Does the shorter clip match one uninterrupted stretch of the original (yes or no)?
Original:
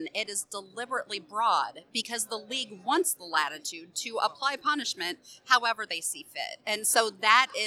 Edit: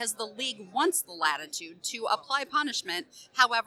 yes